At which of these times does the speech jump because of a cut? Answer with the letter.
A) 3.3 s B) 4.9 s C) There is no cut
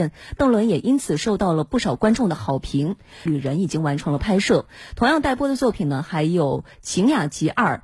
A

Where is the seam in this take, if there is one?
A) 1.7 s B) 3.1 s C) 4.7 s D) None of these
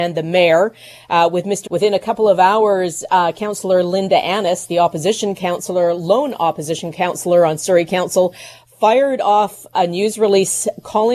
A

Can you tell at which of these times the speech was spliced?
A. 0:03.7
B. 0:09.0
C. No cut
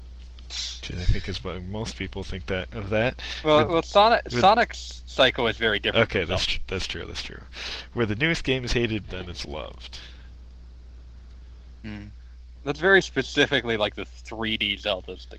B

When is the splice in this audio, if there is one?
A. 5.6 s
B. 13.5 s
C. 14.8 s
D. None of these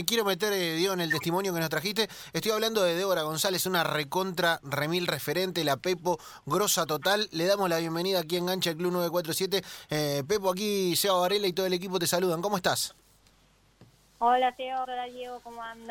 C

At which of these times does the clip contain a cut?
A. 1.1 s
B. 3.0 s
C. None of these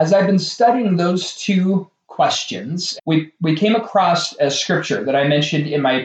B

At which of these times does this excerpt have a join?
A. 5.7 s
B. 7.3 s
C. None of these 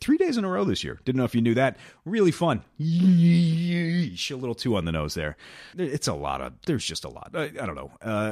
A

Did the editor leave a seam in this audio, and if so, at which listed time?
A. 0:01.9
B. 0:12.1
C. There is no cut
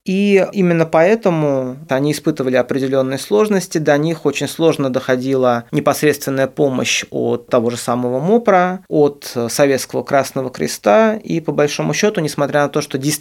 A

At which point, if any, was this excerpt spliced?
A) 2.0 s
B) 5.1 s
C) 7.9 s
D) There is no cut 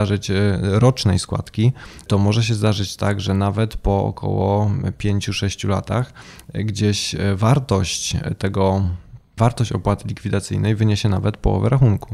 D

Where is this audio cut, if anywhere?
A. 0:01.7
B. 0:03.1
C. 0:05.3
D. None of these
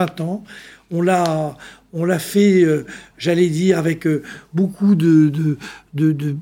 D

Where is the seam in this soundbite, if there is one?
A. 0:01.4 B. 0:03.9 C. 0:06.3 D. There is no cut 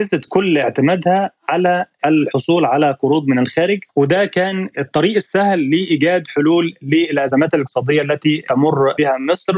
B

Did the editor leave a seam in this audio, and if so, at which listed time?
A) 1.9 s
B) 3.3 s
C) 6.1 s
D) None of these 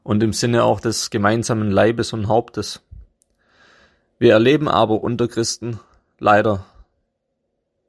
D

